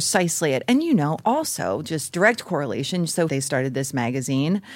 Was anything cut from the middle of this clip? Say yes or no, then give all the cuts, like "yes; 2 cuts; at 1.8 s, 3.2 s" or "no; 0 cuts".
yes; 1 cut; at 3.3 s